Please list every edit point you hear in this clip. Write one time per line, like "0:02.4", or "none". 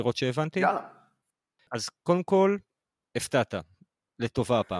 none

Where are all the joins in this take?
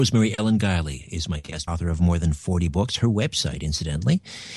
0:01.7

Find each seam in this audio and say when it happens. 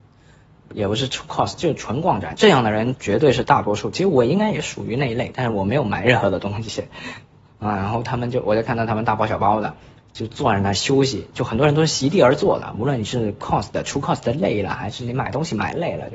none

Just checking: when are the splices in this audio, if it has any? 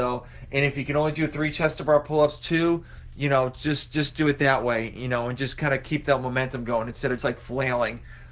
0:07.2

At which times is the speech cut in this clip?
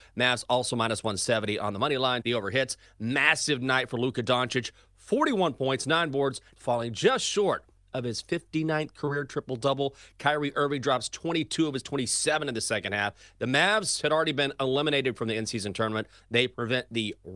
0:02.2
0:06.6
0:16.2

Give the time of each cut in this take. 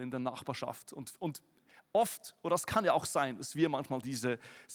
none

